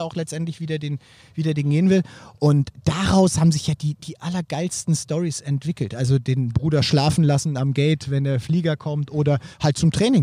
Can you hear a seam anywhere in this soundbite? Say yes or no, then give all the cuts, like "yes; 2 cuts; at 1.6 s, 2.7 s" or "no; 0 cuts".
no; 0 cuts